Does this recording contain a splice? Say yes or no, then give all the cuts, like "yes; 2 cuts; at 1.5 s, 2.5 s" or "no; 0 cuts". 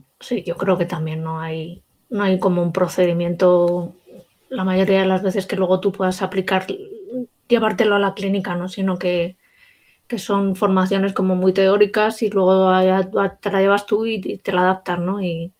no; 0 cuts